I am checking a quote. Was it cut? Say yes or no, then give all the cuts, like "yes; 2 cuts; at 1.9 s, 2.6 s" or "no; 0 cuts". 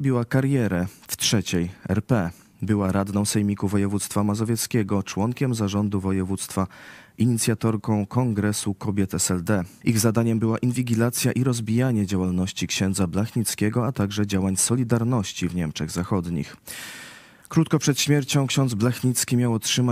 yes; 1 cut; at 9.8 s